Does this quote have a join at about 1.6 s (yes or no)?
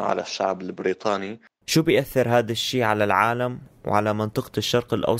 yes